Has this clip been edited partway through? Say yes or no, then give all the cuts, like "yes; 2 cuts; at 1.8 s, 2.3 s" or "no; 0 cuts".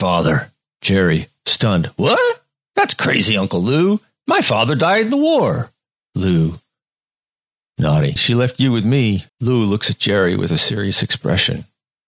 yes; 2 cuts; at 8.2 s, 9.3 s